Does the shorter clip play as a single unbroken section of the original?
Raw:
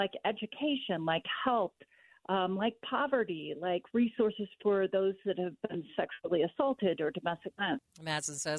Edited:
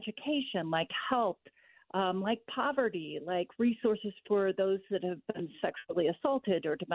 yes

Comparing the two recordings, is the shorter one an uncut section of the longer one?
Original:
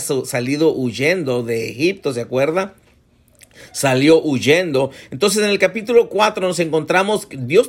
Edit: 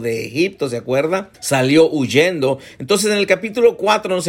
no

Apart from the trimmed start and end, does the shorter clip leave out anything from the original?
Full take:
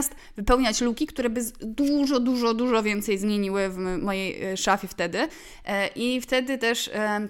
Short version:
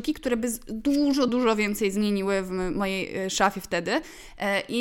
yes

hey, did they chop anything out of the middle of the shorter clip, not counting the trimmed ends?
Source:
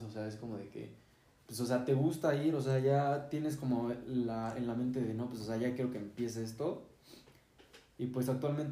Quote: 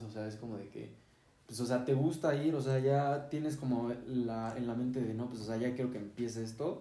no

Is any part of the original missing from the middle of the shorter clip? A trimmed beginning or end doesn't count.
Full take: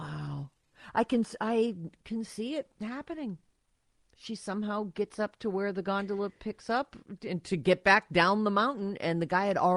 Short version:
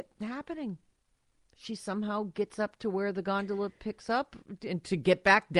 no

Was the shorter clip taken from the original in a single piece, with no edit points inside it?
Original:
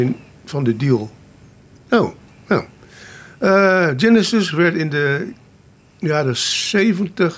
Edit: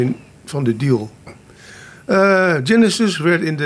no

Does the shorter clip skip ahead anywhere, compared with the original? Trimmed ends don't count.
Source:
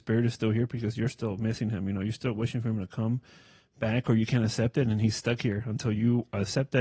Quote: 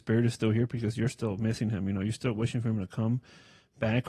no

